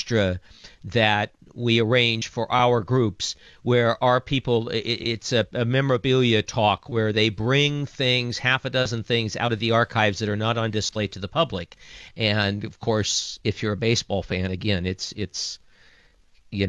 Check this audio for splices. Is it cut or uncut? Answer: cut